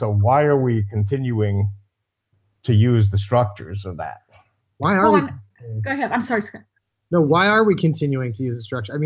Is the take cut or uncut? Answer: uncut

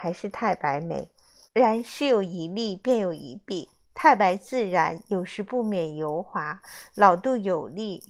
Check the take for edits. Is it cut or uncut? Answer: cut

